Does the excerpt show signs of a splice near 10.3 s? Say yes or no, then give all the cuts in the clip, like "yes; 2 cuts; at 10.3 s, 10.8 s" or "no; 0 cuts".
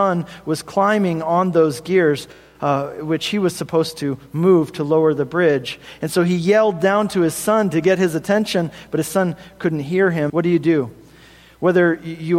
yes; 1 cut; at 10.3 s